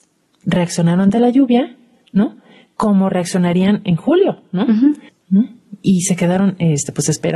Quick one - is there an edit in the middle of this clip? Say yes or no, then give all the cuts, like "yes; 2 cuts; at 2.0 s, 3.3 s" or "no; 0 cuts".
yes; 1 cut; at 5.1 s